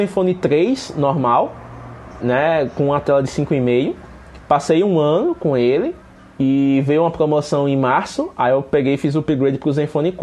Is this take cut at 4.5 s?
no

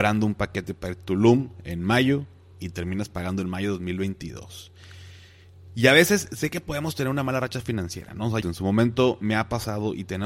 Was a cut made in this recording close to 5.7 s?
no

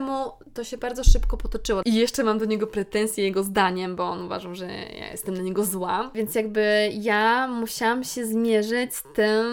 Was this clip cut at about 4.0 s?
no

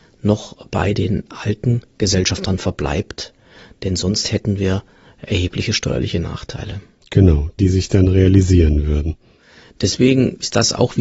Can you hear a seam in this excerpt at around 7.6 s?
yes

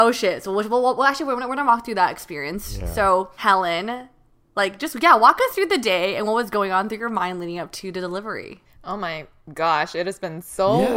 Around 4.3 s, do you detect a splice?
no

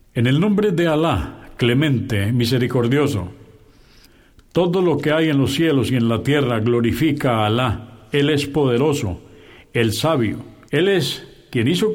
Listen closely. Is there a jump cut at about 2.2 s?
no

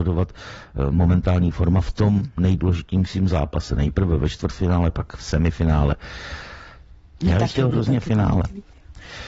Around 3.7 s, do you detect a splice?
no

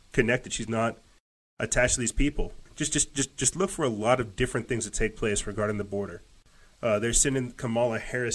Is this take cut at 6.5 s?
no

